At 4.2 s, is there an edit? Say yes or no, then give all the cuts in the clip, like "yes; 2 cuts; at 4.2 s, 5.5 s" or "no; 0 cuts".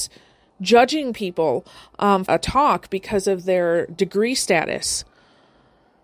no; 1 cut; at 2.3 s